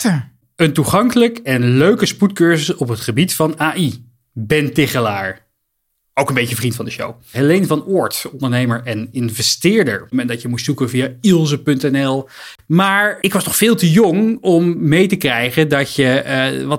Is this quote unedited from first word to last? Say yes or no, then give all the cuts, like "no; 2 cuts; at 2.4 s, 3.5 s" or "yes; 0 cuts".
no; 3 cuts; at 7.3 s, 10.1 s, 13.2 s